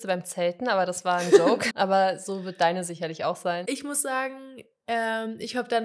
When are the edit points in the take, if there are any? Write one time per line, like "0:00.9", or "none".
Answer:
0:01.7
0:03.6

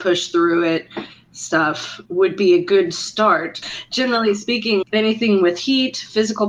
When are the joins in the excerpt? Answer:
0:02.1
0:03.6
0:04.8

